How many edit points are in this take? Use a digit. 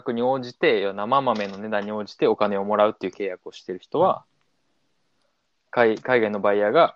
0